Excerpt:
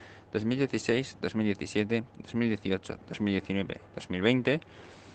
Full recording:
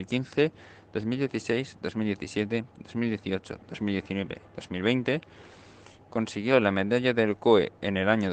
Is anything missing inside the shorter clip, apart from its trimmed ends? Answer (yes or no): no